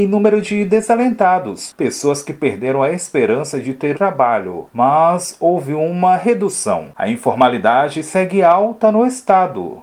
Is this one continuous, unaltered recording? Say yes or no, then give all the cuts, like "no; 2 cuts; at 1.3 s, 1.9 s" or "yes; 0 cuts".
no; 2 cuts; at 3.9 s, 6.9 s